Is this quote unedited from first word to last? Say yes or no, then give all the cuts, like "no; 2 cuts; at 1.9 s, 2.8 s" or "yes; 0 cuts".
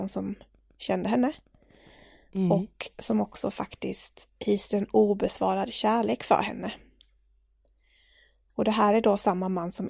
yes; 0 cuts